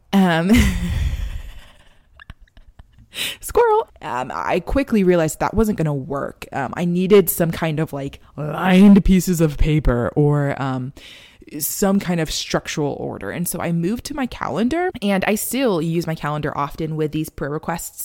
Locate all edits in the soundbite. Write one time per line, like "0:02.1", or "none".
0:03.9

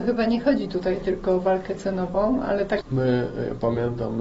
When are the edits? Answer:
0:02.8

